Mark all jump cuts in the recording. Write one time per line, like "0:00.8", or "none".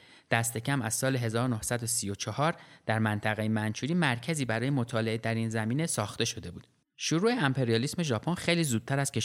0:06.9

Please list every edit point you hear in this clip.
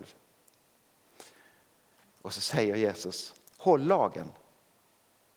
0:02.0

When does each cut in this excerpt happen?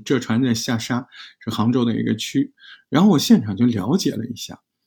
none

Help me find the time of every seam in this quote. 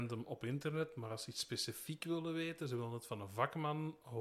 none

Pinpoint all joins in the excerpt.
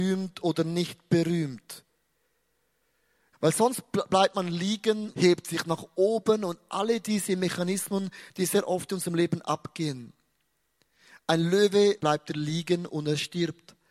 0:03.3
0:05.1
0:12.0

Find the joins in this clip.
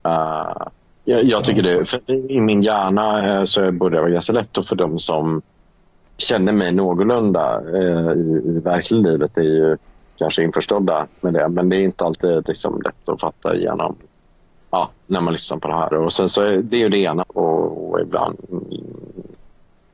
0:15.9
0:17.2

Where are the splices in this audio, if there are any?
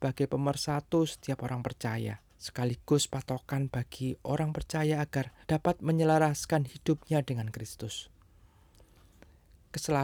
0:02.3
0:05.4

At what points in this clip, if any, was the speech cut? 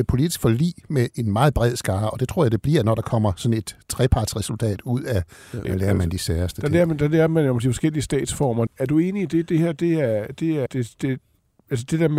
0:05.6
0:08.7
0:10.7

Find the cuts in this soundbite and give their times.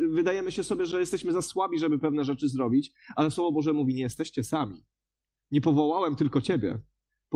none

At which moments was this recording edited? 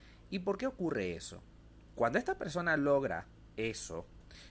0:01.9

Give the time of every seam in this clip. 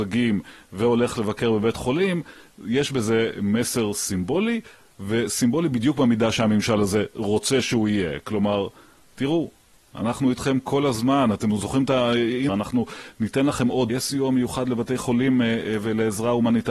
0:09.9
0:12.5
0:13.9

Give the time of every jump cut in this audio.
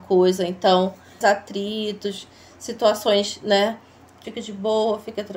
0:01.2
0:04.2

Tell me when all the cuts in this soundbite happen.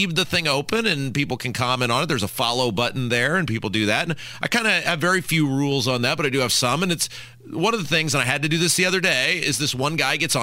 none

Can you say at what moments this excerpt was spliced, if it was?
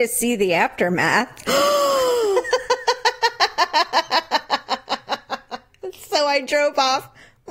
0:01.5

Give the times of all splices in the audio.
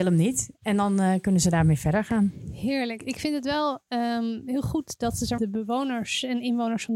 0:05.4

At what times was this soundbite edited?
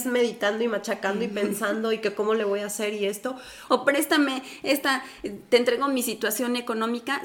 0:03.7

